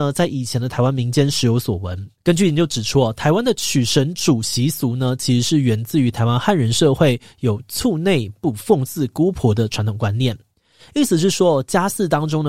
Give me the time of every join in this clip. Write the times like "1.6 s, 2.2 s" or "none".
2.2 s